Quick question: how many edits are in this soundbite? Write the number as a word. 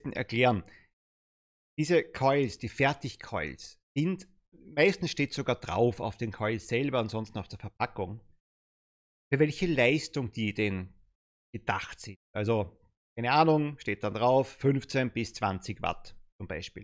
one